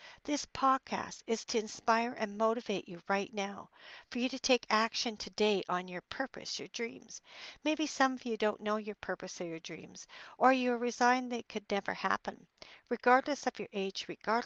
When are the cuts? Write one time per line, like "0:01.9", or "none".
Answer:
none